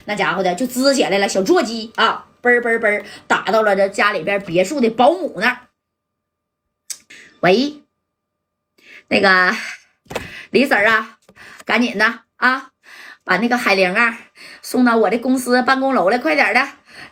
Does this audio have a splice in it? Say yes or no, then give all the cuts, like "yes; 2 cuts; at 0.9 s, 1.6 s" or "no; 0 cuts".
no; 0 cuts